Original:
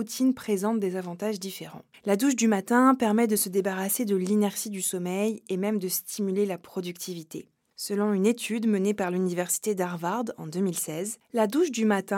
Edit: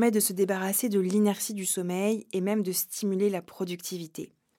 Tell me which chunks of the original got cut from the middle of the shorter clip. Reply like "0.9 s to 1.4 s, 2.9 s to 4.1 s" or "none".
none